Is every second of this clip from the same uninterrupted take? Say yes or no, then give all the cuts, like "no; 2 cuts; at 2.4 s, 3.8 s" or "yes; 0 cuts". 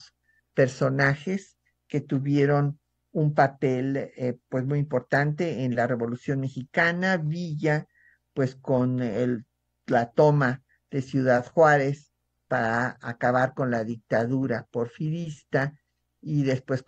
yes; 0 cuts